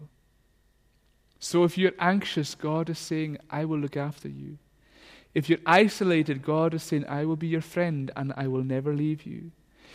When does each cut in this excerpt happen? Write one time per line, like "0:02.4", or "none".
none